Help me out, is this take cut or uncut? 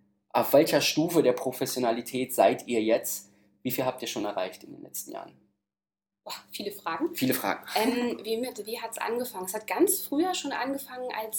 uncut